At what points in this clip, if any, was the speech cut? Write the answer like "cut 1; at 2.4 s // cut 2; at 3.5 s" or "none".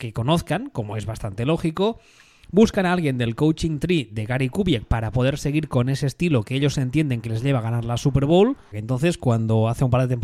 cut 1; at 8.7 s